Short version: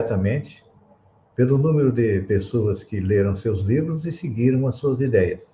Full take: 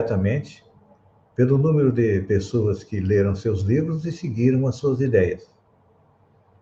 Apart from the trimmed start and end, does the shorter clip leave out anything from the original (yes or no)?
no